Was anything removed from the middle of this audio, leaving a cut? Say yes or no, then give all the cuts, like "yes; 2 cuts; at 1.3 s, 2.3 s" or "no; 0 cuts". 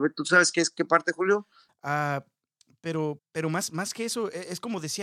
yes; 2 cuts; at 1.7 s, 3.2 s